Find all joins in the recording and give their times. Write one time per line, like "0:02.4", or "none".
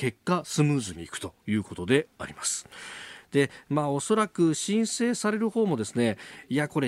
0:03.2